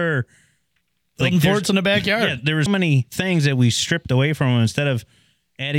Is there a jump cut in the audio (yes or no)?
yes